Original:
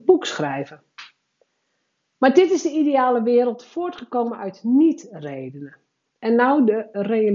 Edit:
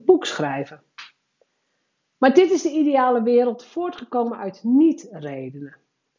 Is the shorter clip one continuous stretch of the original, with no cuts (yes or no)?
yes